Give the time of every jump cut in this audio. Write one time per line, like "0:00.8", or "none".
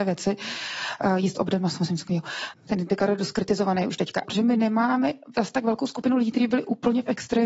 0:02.5
0:04.2